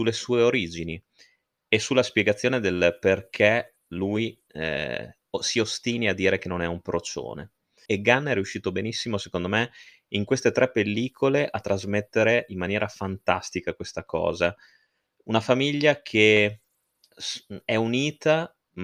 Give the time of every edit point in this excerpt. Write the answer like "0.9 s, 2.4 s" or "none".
7.9 s